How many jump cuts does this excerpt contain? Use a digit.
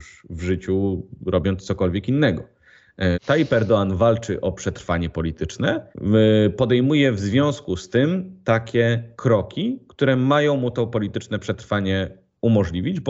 2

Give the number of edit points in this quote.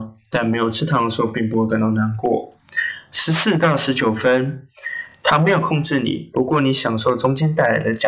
0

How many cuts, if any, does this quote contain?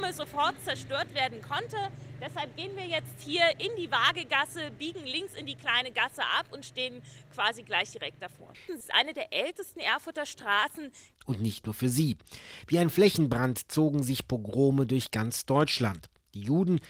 2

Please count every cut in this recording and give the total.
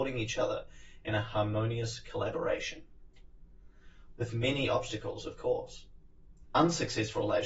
0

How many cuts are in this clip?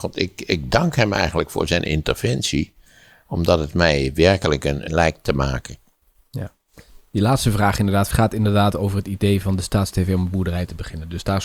2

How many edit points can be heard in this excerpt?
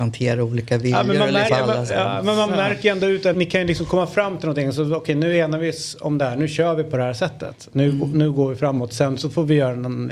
2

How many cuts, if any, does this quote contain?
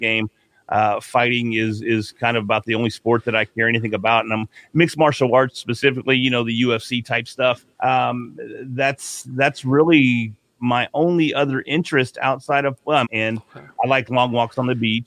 2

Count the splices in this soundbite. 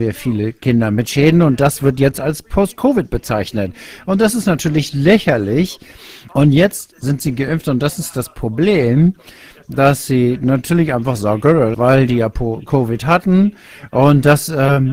2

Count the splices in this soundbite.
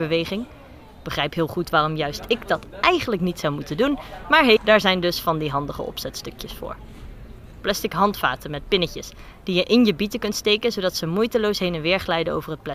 1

